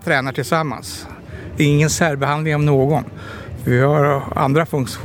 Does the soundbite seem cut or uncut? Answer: uncut